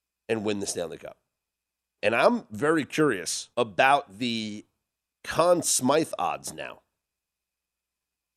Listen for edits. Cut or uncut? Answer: cut